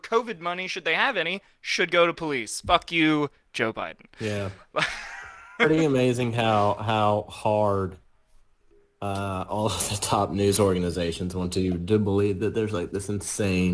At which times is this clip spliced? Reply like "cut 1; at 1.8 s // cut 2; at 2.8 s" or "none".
none